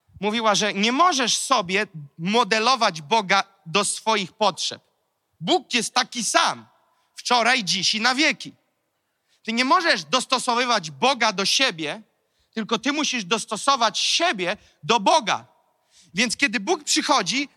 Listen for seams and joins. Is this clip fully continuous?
yes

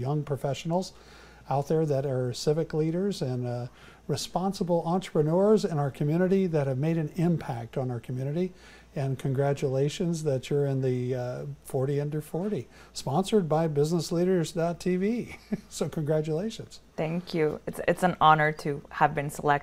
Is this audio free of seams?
yes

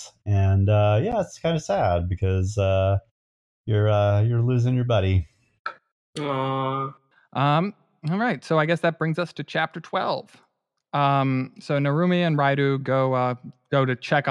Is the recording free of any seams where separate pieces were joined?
yes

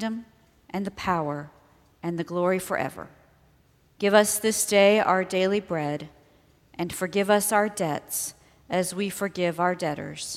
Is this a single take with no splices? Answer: no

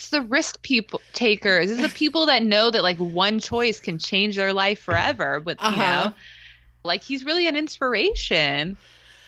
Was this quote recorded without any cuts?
no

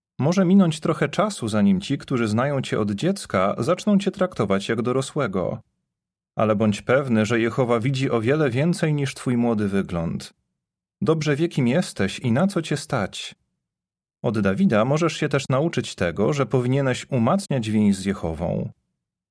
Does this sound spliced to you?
no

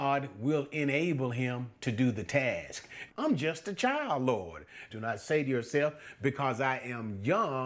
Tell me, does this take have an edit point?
yes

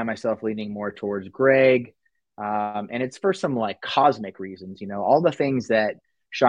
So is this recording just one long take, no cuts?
yes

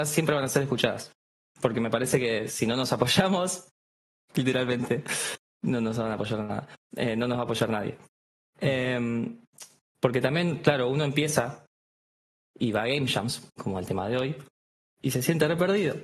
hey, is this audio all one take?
yes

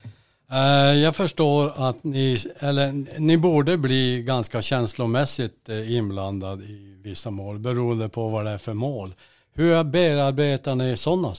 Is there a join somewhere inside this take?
no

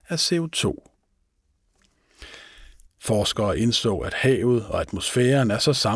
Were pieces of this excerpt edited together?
yes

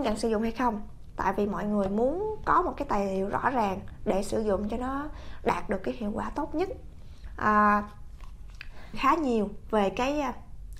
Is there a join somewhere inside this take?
yes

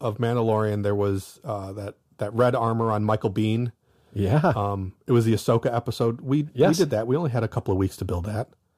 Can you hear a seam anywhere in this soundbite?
no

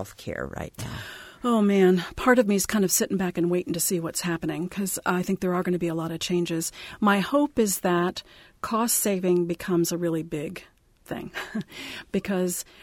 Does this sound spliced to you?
no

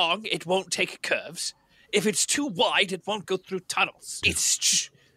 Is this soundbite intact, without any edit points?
no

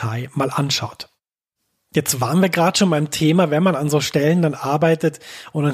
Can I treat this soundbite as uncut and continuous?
yes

